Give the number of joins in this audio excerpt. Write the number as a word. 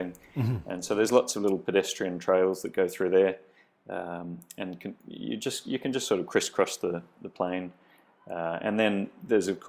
zero